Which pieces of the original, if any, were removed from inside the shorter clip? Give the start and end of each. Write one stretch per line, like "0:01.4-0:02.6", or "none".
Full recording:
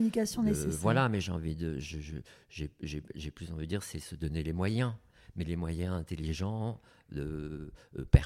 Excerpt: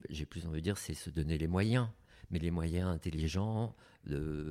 none

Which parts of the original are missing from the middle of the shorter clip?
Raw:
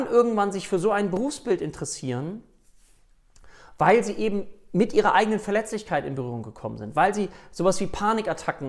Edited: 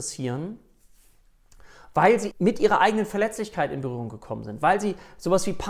0:04.2-0:04.6

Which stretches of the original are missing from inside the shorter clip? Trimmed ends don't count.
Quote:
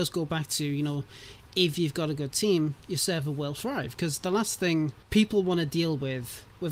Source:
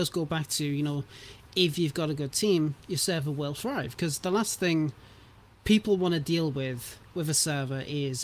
0:05.0-0:05.6

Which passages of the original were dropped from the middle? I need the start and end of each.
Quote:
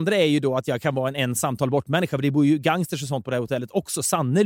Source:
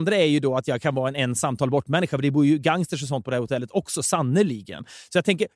none

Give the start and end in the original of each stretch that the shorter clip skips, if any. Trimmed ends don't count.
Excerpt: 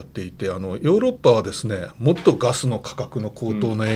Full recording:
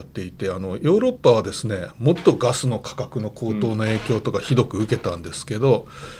none

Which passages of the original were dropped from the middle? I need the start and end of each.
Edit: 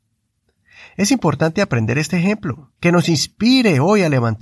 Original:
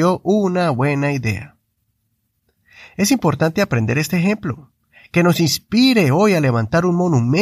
0:04.8-0:05.1

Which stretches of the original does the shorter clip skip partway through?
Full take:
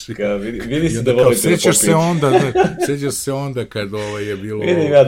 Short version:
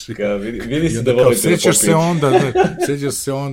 none

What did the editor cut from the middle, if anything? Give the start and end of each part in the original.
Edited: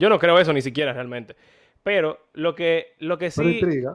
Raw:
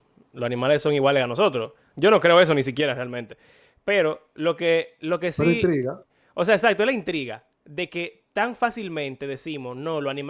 none

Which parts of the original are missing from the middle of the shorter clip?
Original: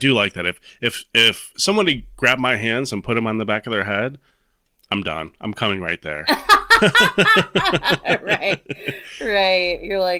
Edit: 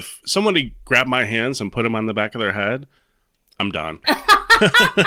0:05.4-0:06.2

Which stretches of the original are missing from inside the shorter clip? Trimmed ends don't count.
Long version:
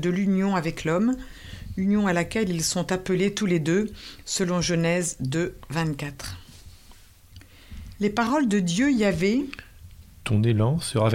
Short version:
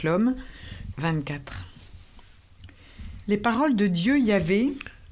0:01.7-0:05.7

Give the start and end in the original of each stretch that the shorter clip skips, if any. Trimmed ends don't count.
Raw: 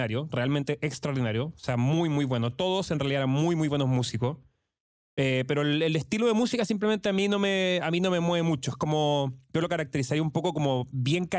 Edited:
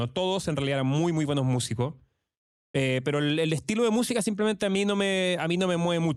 none

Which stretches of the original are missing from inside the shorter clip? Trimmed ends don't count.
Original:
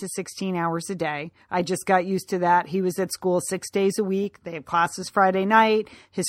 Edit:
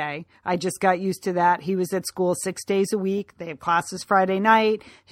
none

